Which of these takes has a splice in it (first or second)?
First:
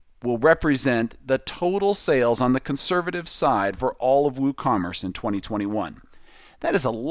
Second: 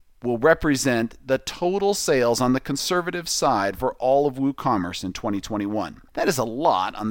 second